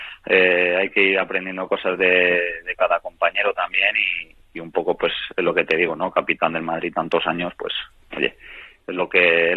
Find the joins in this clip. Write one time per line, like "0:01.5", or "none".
none